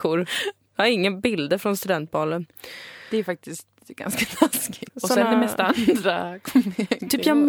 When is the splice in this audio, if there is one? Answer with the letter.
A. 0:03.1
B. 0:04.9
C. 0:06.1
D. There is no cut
B